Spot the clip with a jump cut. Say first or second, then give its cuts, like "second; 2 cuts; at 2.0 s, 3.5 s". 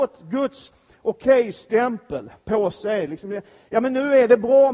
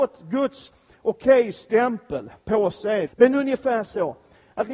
second; 1 cut; at 3.1 s